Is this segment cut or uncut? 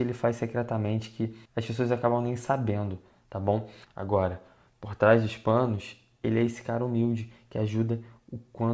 cut